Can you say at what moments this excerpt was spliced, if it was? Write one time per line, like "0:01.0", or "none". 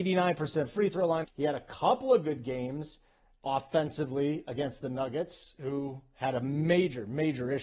0:01.2